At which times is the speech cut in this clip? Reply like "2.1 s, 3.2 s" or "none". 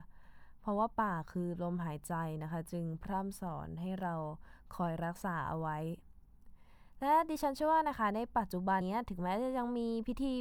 8.8 s